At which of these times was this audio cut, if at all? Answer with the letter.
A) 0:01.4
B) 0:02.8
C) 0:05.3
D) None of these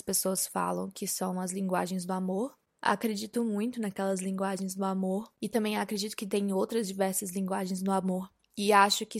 B